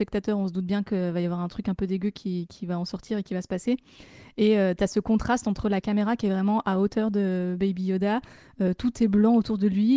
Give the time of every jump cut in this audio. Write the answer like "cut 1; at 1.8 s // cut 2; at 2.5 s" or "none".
none